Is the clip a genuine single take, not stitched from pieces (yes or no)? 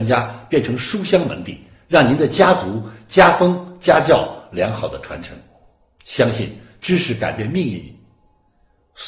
yes